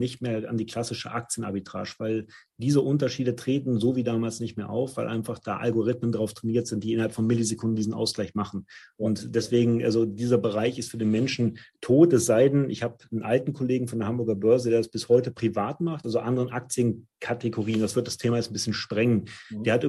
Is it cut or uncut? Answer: cut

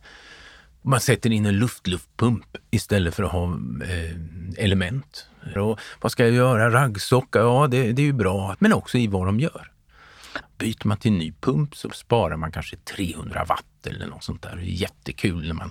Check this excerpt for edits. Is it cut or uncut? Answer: cut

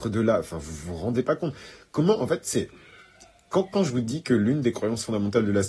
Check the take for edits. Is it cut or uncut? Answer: uncut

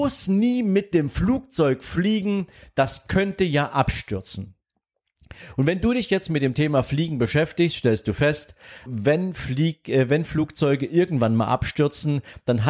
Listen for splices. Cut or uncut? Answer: cut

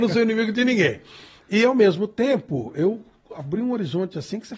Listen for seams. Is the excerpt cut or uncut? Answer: uncut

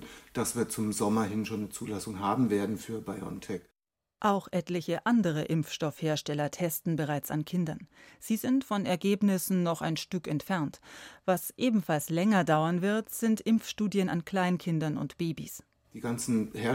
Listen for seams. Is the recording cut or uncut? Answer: uncut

